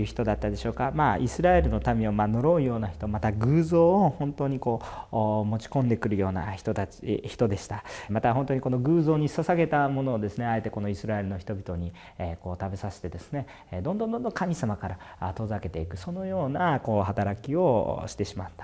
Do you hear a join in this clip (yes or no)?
yes